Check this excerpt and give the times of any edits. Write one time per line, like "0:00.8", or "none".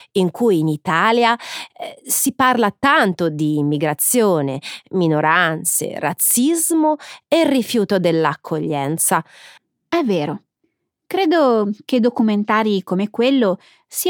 none